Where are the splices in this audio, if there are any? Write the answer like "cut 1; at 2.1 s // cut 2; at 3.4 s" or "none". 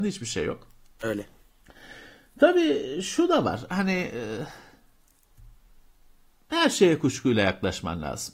none